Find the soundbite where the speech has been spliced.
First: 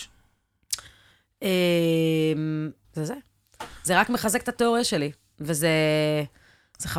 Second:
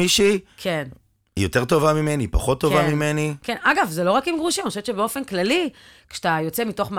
first; 1 cut; at 2.8 s

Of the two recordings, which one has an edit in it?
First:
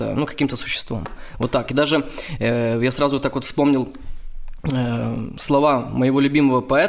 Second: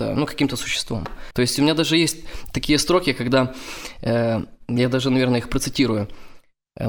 second; 1 cut; at 1.3 s

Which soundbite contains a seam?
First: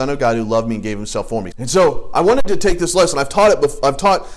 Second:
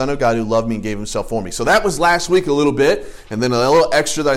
first; 1 cut; at 1.5 s

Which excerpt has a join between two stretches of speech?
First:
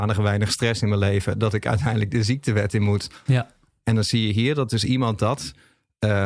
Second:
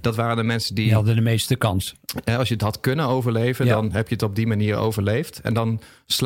first; 1 cut; at 3.3 s

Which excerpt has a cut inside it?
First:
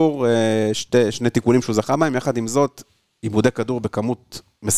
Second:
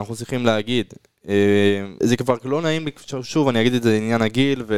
second; 1 cut; at 2.0 s

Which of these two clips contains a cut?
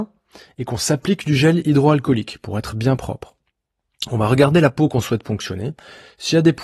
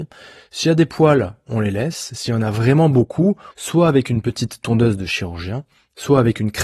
second; 1 cut; at 3.5 s

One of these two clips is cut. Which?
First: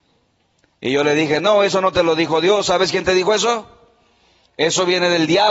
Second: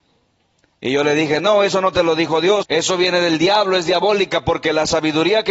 second; 1 cut; at 2.6 s

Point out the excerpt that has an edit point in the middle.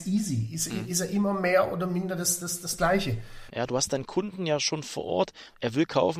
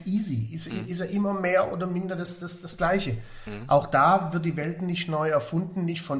first; 1 cut; at 3.5 s

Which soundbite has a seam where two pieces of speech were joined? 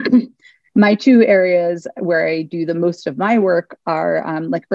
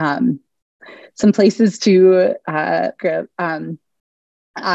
second; 1 cut; at 3.0 s

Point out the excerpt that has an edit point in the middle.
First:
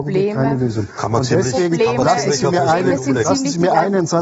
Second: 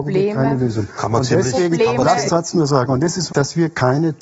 second; 2 cuts; at 2.3 s, 3.3 s

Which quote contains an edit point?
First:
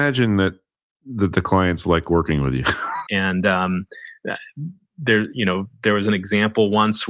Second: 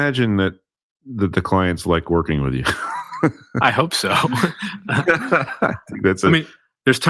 first; 1 cut; at 3.1 s

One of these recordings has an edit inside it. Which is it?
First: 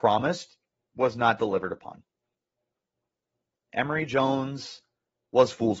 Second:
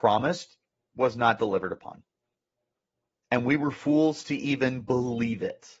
second; 1 cut; at 3.2 s

